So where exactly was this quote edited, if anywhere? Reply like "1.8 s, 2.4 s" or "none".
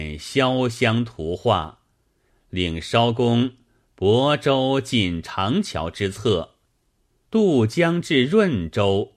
2.3 s, 7.2 s